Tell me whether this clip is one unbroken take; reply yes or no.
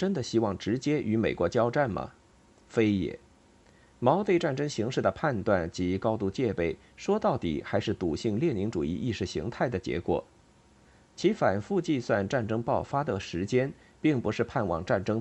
yes